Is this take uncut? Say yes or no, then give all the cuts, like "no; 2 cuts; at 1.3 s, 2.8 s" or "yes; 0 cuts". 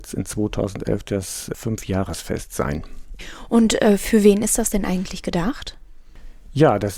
yes; 0 cuts